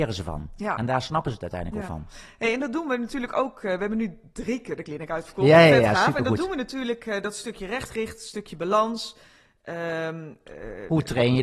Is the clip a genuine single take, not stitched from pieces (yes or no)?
yes